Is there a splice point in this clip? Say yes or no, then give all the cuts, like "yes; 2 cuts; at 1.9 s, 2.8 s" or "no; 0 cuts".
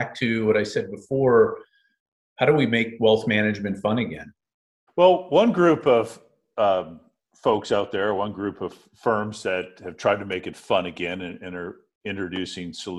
yes; 1 cut; at 4.9 s